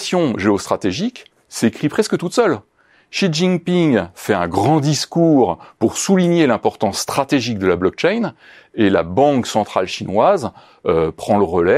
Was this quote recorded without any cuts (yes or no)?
yes